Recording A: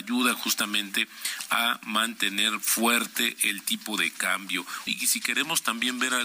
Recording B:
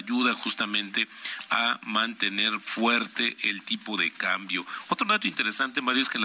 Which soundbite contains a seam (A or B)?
A